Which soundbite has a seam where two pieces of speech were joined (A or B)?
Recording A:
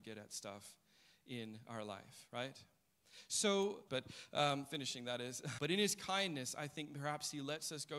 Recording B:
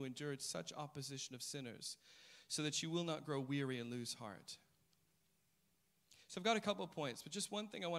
A